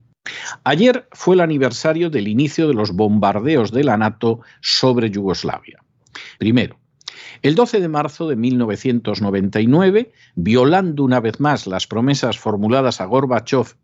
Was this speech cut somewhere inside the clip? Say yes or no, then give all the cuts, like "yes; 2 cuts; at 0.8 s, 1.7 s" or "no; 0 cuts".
yes; 1 cut; at 6.3 s